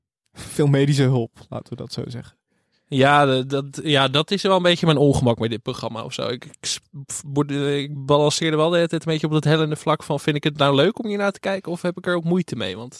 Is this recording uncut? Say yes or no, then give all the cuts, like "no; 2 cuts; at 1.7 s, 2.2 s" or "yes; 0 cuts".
yes; 0 cuts